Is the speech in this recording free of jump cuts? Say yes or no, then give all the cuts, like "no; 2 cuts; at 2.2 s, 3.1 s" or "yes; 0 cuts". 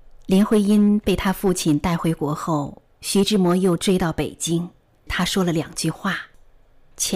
no; 1 cut; at 5.1 s